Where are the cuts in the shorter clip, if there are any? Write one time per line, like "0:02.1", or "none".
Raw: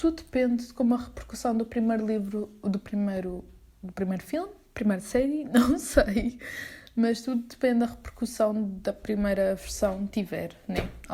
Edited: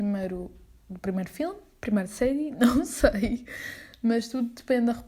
none